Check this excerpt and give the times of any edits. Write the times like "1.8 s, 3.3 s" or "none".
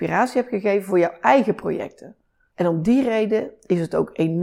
2.5 s

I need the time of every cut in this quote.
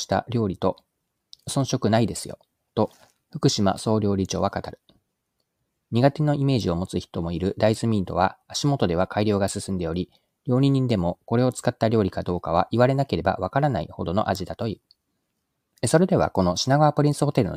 15.7 s

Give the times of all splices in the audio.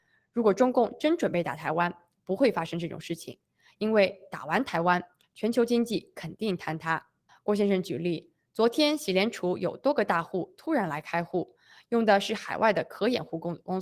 7.3 s

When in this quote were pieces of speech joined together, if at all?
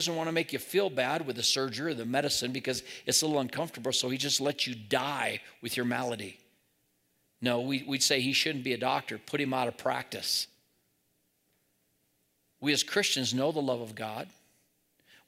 none

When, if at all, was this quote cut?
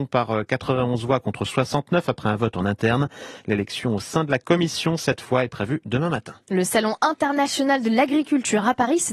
none

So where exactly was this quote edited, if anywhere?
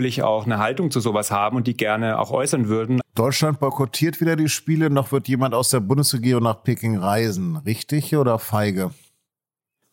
3.0 s

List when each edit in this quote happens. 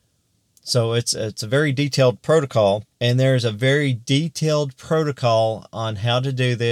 3.0 s

